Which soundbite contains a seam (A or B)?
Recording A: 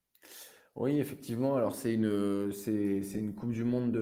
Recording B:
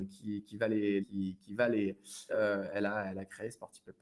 B